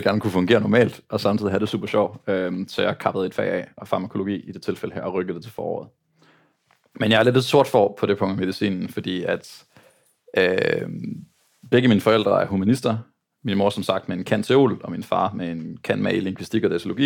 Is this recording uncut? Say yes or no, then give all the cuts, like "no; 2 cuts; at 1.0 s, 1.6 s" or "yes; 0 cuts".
yes; 0 cuts